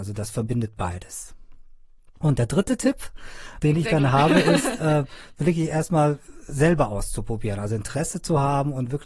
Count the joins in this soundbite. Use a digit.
0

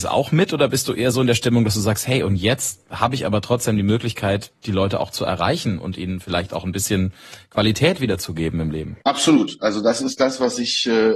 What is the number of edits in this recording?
1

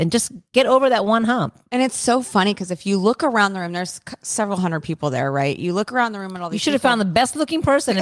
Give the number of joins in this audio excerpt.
0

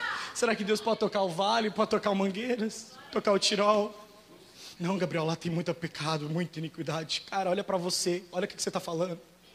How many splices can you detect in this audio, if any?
1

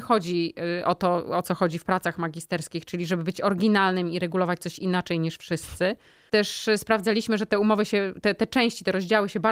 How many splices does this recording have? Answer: 1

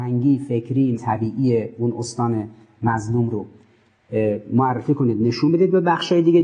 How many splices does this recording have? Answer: 1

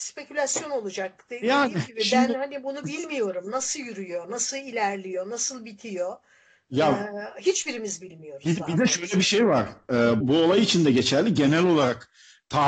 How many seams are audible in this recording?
1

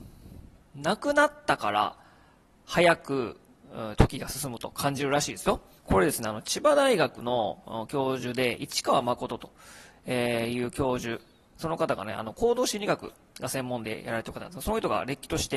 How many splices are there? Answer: 2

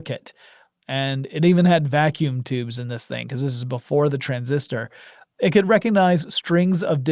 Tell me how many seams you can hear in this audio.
0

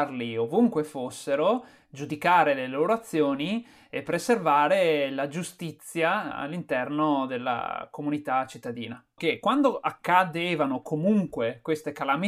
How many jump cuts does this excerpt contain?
1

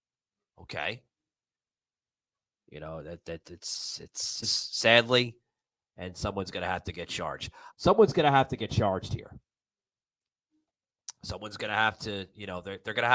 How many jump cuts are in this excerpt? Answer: 3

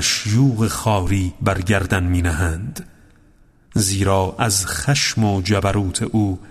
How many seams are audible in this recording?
0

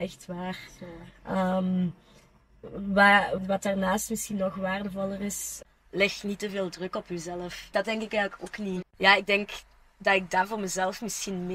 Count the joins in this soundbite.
3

